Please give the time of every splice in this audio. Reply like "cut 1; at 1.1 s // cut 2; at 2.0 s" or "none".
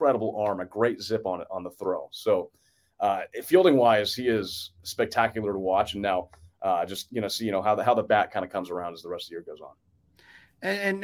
none